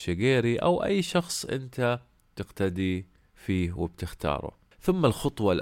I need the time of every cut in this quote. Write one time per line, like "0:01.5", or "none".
0:04.7